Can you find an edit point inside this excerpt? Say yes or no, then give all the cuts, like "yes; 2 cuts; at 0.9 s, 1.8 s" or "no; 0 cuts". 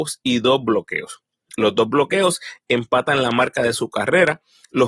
no; 0 cuts